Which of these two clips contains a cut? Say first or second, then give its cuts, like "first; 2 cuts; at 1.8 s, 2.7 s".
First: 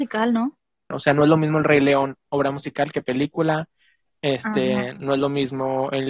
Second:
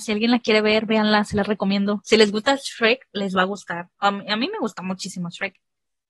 first; 1 cut; at 0.9 s